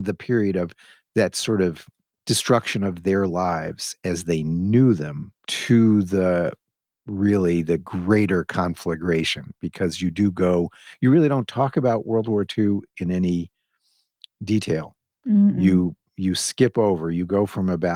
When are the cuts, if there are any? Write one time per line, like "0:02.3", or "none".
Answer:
0:05.4